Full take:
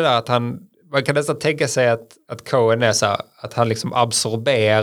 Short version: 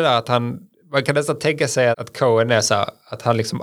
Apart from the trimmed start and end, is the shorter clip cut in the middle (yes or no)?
yes